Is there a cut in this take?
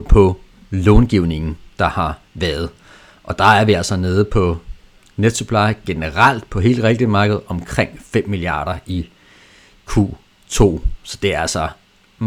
no; 0 cuts

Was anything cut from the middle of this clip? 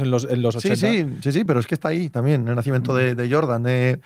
no; 0 cuts

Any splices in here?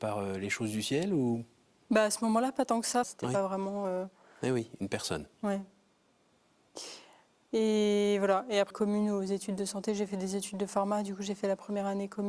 yes; 2 cuts; at 3.0 s, 8.7 s

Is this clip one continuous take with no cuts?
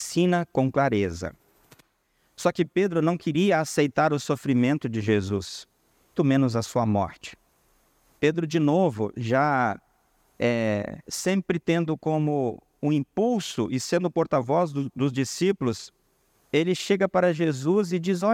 no; 1 cut; at 6.2 s

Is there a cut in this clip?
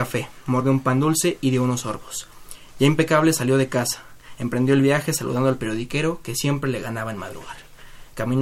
no; 0 cuts

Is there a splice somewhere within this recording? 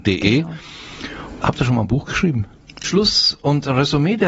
yes; 1 cut; at 2.8 s

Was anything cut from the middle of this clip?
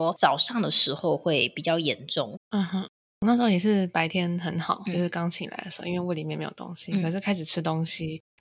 yes; 1 cut; at 2.4 s

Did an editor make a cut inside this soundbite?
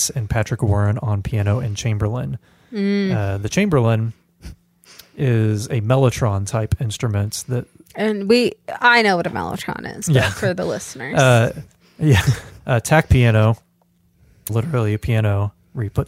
yes; 2 cuts; at 12.6 s, 14.5 s

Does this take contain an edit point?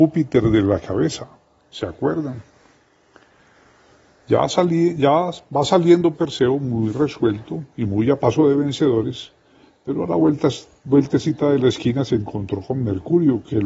yes; 1 cut; at 6.1 s

